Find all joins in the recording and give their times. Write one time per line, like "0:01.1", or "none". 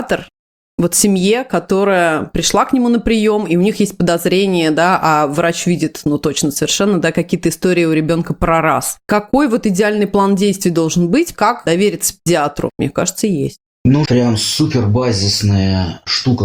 0:12.7
0:14.0